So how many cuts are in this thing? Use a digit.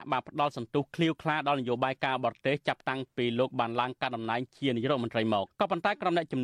1